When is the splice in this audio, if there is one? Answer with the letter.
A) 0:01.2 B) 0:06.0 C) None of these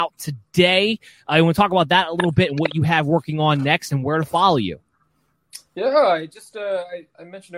C